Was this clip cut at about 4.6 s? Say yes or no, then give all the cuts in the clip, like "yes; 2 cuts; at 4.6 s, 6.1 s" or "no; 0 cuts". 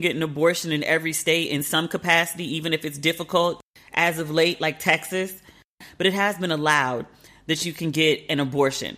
no; 0 cuts